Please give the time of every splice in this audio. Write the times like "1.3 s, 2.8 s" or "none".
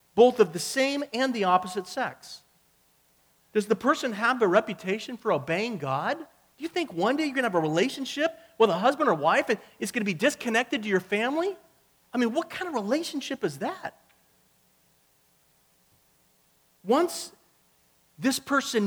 6.5 s